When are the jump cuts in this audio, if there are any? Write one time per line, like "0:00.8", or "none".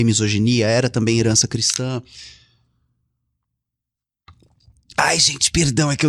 none

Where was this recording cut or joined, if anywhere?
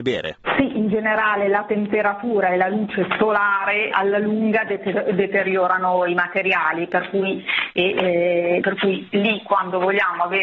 0:03.9
0:08.6

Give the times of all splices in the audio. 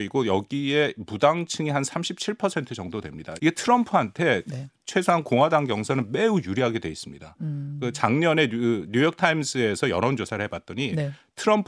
0:03.4

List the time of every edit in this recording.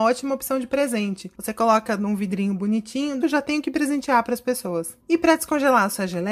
0:03.2

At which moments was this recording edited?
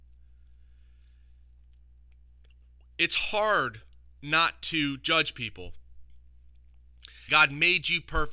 0:07.3

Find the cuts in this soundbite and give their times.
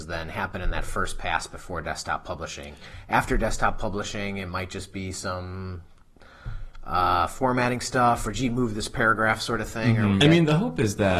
0:10.2

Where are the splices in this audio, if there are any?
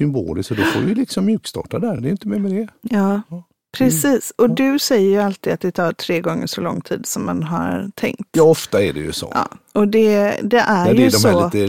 none

